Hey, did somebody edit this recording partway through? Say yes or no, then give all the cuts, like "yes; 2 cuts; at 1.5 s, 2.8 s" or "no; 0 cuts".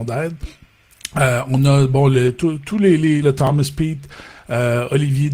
yes; 1 cut; at 3.2 s